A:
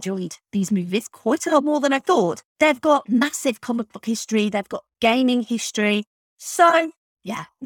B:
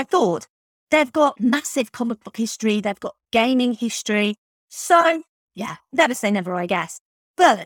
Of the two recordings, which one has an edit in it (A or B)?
A